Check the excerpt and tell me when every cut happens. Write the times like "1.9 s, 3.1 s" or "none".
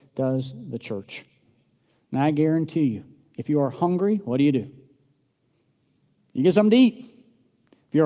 none

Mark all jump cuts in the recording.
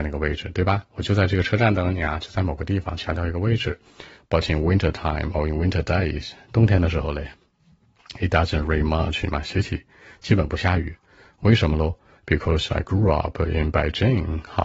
4.2 s, 12.1 s

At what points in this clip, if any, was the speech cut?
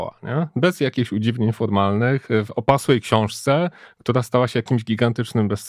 none

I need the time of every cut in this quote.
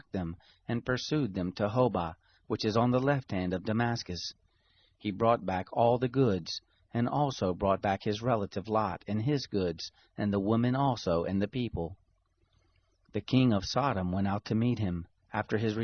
none

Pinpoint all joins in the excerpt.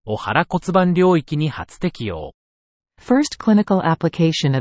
2.8 s

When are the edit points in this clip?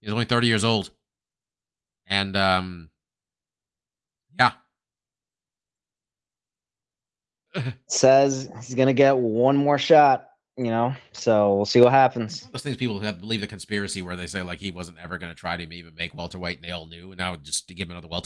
7.5 s

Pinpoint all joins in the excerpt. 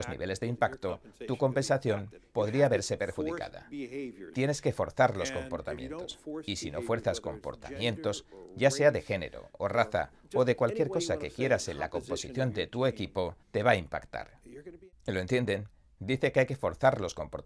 13.4 s, 14.9 s

